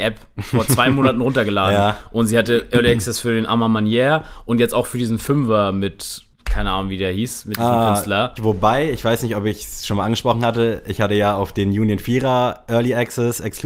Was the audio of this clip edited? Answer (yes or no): yes